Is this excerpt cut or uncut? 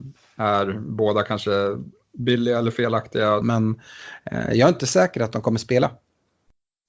cut